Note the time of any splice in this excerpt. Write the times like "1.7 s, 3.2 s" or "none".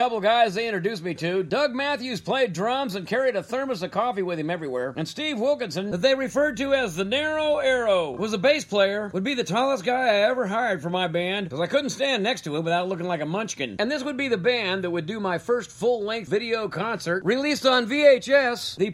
none